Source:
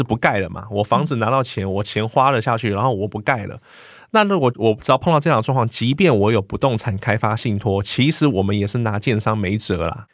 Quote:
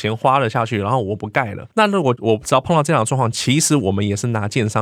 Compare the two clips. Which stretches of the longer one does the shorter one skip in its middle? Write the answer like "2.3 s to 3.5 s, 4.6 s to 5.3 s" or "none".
3.6 s to 4.1 s, 5.7 s to 7.8 s